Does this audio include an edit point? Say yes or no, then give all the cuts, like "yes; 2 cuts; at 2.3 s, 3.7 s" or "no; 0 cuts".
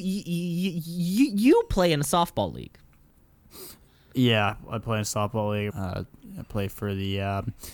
yes; 1 cut; at 5.7 s